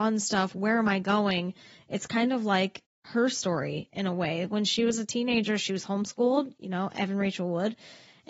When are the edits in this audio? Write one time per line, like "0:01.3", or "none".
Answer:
none

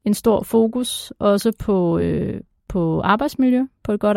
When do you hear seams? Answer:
none

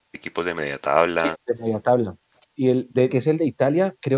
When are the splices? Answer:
0:01.3
0:03.1

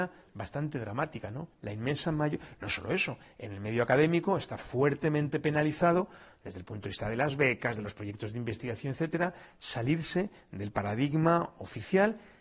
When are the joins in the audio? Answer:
none

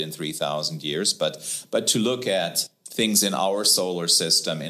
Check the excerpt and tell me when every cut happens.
none

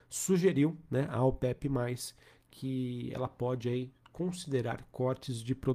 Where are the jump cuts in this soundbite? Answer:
none

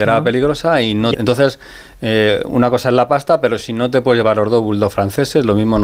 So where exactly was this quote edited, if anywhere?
0:01.1

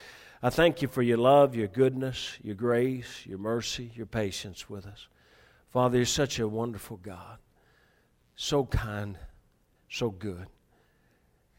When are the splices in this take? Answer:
0:09.8

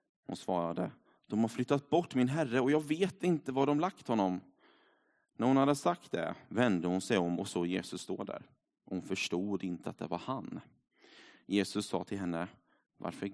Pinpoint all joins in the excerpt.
none

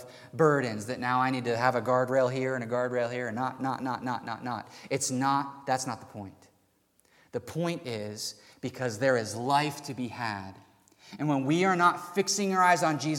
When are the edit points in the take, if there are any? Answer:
0:03.6

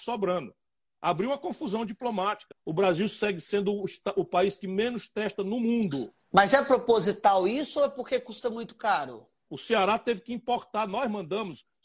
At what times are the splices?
0:02.5
0:09.5

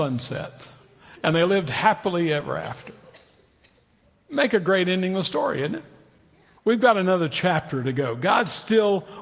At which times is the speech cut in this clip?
0:06.6

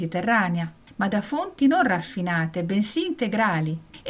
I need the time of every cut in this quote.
none

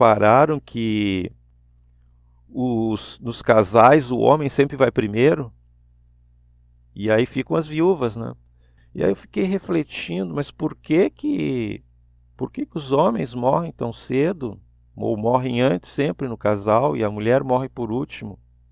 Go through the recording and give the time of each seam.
0:08.8

